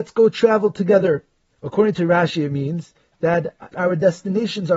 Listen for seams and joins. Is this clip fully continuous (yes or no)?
no